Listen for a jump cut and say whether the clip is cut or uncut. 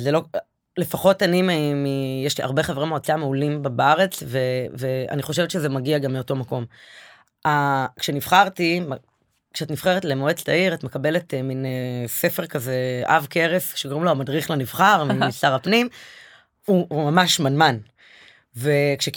uncut